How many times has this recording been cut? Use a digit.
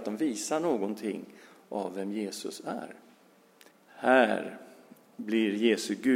1